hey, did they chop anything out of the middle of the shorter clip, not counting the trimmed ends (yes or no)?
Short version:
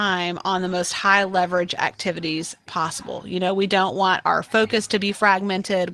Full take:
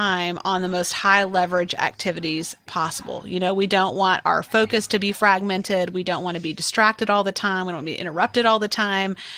no